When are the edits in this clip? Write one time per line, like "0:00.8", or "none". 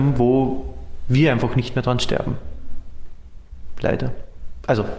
none